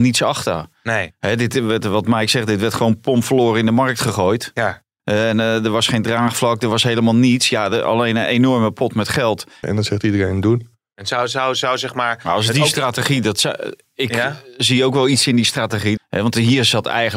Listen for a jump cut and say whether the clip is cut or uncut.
cut